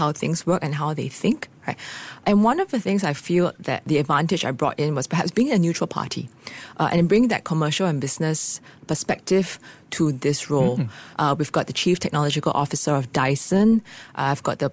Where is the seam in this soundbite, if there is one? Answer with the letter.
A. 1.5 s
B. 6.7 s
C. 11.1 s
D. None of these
C